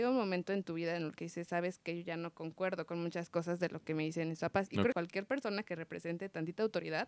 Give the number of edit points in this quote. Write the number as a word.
one